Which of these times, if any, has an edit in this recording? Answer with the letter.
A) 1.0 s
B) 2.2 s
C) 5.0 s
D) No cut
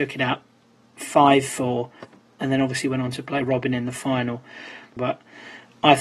C